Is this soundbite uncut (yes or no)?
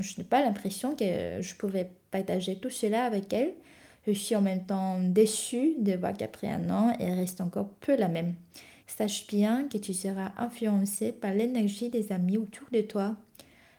no